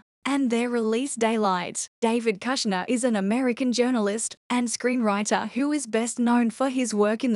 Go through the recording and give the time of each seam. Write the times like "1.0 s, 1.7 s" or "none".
2.0 s, 4.4 s